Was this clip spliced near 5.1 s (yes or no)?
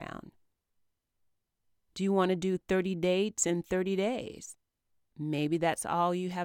yes